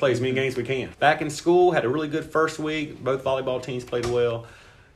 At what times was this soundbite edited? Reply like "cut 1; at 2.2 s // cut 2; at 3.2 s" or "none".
cut 1; at 0.9 s